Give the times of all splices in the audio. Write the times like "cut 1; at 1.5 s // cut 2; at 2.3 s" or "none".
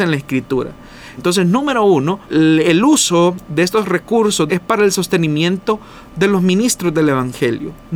cut 1; at 1.2 s // cut 2; at 2.2 s // cut 3; at 4.5 s